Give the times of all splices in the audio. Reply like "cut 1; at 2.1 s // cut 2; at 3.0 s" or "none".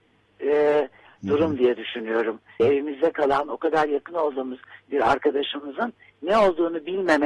cut 1; at 1.2 s // cut 2; at 2.6 s